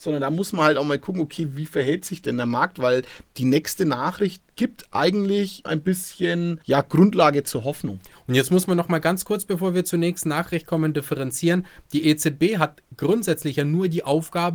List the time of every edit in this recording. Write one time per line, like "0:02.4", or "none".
0:05.6
0:08.1